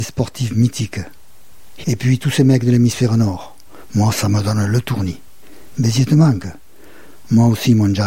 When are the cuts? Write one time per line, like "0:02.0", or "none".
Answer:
0:01.8